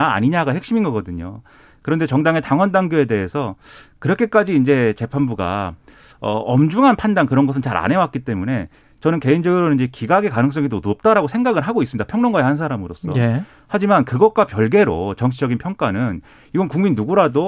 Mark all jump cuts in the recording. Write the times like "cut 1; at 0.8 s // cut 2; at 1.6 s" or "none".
none